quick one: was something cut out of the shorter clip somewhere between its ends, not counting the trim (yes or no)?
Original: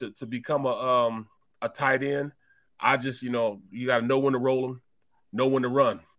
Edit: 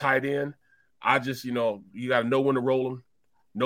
no